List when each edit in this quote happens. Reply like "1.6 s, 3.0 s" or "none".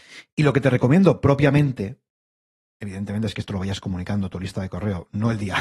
none